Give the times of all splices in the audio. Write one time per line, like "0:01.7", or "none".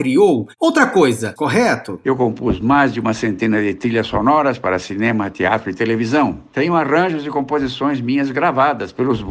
0:01.4